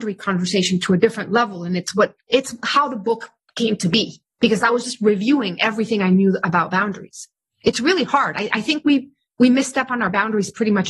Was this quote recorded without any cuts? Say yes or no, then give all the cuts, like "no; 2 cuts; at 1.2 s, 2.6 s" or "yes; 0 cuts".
yes; 0 cuts